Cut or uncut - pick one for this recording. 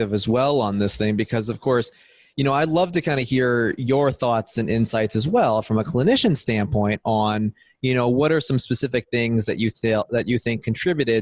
uncut